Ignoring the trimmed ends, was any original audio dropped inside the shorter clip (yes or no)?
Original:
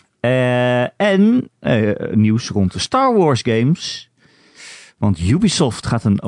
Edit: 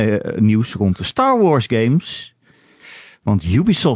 no